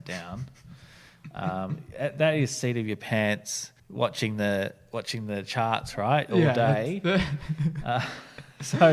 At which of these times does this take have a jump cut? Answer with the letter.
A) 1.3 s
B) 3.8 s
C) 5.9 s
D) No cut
B